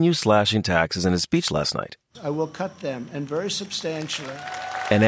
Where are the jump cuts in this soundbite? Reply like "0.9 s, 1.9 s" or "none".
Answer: 2.1 s